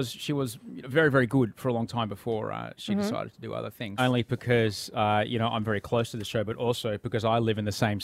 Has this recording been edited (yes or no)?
yes